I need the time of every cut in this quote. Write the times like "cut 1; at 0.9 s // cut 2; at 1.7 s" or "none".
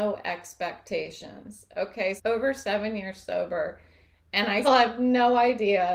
cut 1; at 2.2 s // cut 2; at 4.6 s